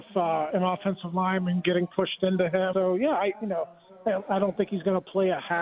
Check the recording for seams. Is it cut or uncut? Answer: cut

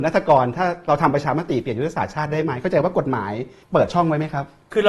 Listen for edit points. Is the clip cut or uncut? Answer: cut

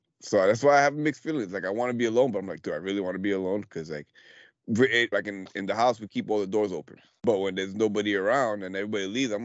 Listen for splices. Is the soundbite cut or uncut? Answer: cut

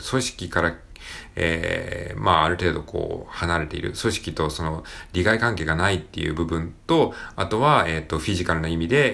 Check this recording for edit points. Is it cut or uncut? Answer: uncut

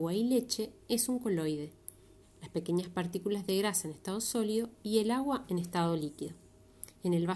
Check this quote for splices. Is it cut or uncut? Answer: cut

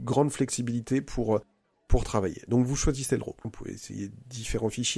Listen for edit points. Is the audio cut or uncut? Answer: cut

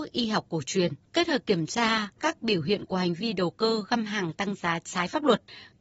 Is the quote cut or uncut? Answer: cut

